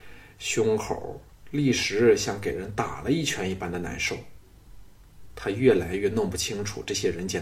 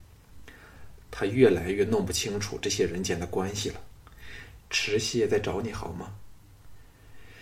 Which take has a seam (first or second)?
second